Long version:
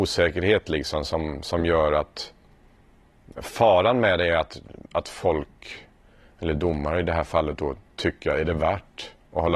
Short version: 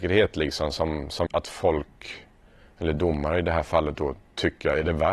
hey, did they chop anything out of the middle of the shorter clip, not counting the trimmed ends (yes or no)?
yes